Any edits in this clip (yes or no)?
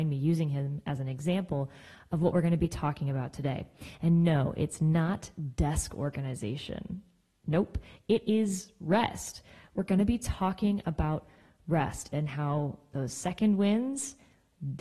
no